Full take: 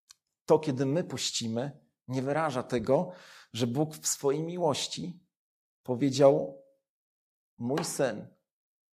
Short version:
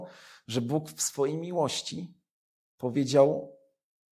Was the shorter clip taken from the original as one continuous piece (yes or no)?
yes